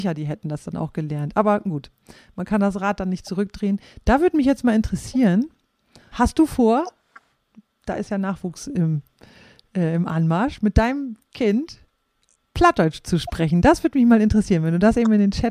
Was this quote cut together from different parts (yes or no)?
yes